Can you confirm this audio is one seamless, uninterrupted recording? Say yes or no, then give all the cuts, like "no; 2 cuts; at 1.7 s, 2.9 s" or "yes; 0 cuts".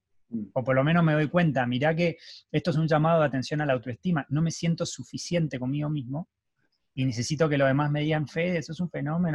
yes; 0 cuts